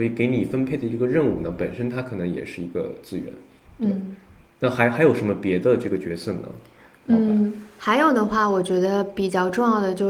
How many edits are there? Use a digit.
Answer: 0